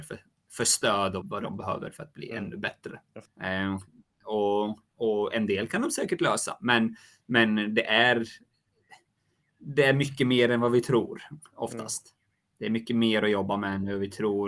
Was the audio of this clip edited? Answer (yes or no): yes